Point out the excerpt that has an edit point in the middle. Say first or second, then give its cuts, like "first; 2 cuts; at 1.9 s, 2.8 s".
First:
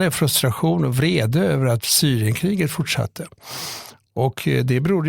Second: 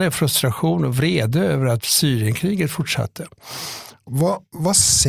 second; 1 cut; at 4.1 s